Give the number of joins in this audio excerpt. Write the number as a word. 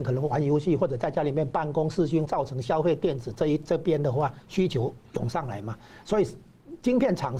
one